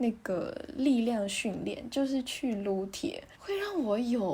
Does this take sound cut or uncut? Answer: cut